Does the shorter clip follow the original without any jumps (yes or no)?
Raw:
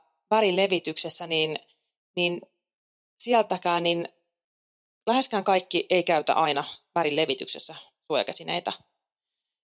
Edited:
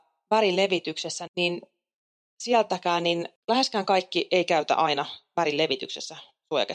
no